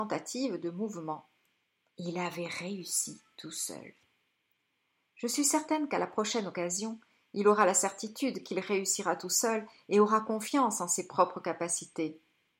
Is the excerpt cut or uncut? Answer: cut